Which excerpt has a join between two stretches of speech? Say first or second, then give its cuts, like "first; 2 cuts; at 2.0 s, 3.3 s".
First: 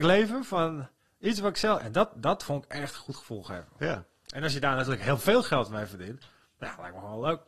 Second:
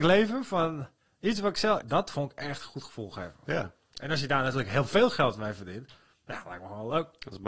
second; 1 cut; at 1.8 s